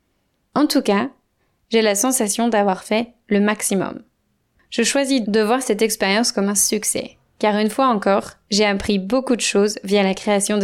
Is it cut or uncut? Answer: cut